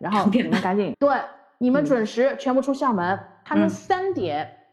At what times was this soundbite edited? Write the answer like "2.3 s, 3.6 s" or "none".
0.9 s